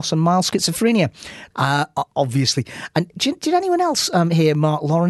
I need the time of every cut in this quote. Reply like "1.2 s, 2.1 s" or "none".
1.5 s